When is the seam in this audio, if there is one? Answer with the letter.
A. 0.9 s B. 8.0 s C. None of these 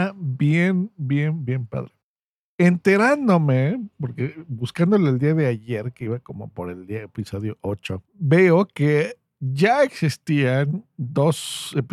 B